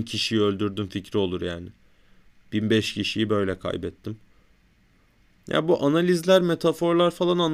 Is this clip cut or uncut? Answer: uncut